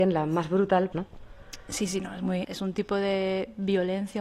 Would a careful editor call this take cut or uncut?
cut